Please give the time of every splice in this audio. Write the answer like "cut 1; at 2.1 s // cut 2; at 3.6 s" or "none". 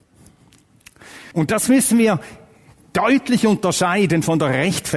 cut 1; at 1.3 s